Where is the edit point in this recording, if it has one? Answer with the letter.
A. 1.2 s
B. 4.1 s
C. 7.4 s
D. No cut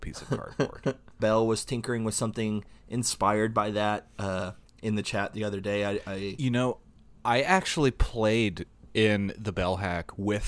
A